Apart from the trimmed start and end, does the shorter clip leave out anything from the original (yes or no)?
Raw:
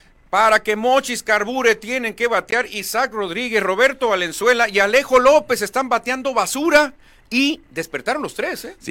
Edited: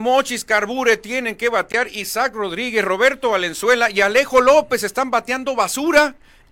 no